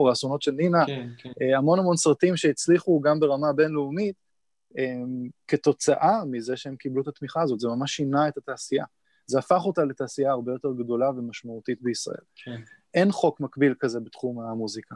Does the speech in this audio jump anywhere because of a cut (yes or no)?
no